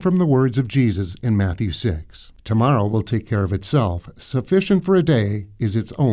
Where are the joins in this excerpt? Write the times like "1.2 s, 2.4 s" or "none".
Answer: 2.4 s